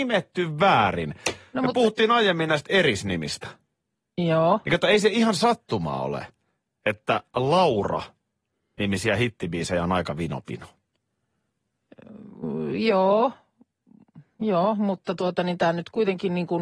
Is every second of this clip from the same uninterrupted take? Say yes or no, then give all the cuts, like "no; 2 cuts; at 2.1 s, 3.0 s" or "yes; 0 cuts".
yes; 0 cuts